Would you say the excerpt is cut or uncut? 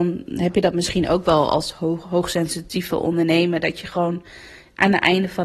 uncut